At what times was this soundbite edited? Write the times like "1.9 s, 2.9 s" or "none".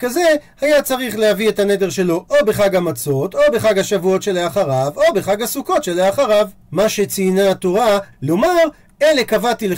6.6 s, 8.1 s